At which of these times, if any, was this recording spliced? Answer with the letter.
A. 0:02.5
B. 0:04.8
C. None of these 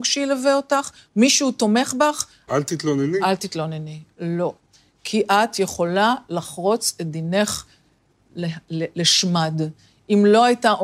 A